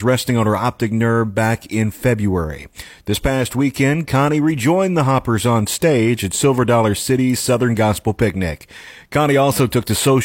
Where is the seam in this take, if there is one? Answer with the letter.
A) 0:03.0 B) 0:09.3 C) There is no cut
A